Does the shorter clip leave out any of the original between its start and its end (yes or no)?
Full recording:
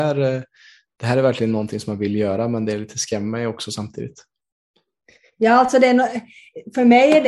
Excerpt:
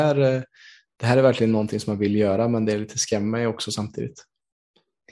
no